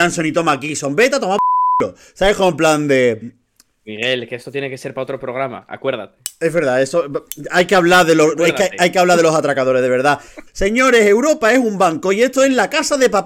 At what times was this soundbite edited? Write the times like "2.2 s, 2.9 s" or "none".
10.5 s